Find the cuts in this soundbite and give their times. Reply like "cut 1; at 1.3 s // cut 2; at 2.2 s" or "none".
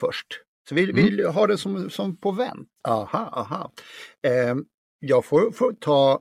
cut 1; at 2.8 s